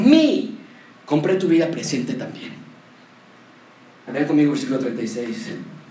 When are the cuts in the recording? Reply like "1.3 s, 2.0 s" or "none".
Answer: 0.9 s, 4.1 s